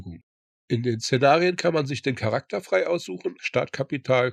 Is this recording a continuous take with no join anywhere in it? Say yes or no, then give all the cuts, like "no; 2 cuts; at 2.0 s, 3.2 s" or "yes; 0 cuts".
no; 1 cut; at 3.4 s